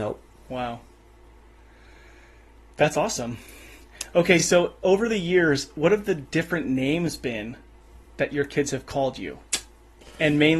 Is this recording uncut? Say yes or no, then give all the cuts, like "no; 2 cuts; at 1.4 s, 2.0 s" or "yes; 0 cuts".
yes; 0 cuts